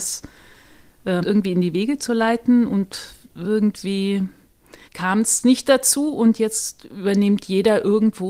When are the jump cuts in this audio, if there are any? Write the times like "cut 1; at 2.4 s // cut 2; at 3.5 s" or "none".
cut 1; at 1.2 s // cut 2; at 4.9 s